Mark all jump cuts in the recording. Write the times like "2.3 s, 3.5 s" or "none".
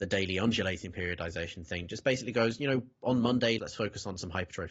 3.6 s